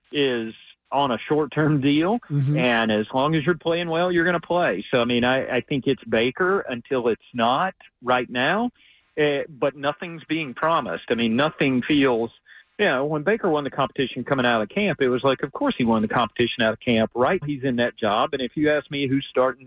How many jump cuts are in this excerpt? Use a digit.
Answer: 1